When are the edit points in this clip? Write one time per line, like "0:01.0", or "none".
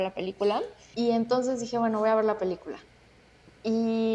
0:00.9